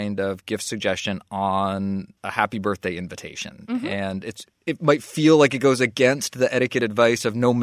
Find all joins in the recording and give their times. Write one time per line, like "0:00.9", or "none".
0:02.2
0:04.5